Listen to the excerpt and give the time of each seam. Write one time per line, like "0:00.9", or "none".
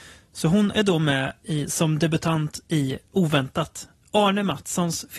0:03.1